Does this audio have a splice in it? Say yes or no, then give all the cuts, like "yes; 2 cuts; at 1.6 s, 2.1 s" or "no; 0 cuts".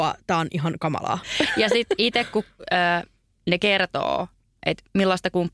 no; 0 cuts